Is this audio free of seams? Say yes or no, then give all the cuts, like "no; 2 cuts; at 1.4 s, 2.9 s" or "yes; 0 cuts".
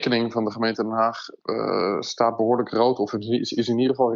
no; 1 cut; at 1.4 s